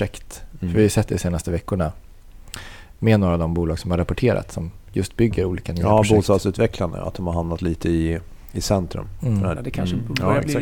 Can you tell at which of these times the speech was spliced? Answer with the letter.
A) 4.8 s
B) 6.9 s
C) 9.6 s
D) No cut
C